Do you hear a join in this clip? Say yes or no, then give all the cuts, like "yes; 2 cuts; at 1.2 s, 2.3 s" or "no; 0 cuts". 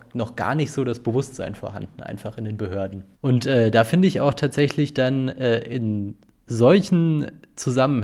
yes; 1 cut; at 3.1 s